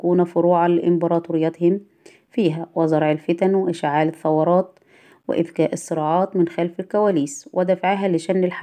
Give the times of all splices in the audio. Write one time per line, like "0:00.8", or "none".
none